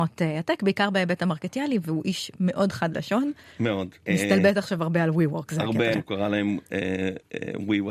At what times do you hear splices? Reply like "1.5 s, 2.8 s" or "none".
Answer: 4.1 s, 5.9 s